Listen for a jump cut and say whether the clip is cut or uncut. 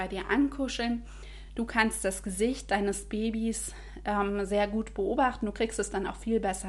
uncut